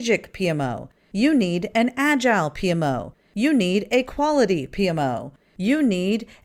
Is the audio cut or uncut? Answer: uncut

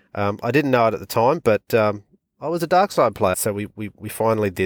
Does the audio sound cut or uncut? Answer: cut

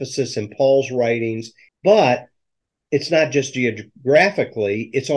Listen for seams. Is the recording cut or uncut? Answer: cut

